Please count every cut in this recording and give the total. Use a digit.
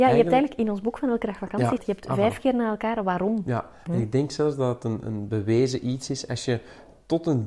2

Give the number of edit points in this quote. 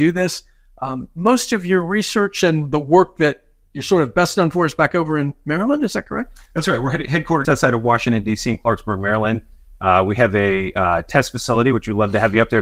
1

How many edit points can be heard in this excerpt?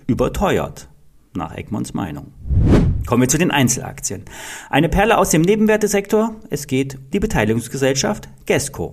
1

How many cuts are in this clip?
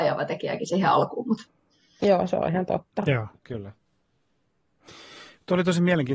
0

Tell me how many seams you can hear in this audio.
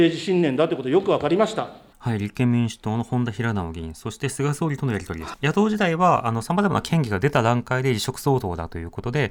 2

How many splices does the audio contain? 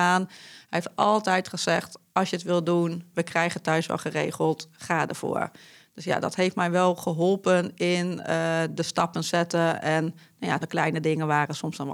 1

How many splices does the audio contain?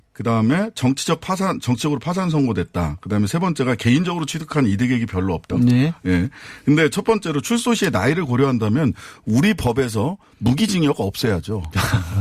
1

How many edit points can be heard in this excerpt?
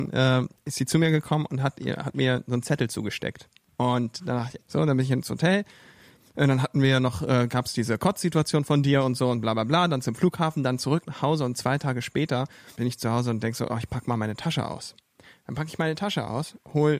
1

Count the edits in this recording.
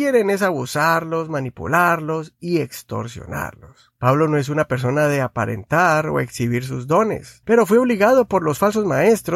2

